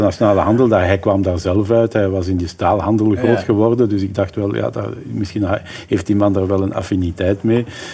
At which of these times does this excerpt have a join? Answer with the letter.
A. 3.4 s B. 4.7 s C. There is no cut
C